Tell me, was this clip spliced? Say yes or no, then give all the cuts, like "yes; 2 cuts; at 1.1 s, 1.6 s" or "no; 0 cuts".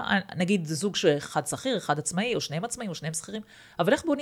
no; 0 cuts